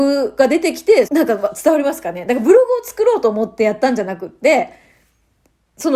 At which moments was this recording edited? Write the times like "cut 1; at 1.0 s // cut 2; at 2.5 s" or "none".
cut 1; at 1.1 s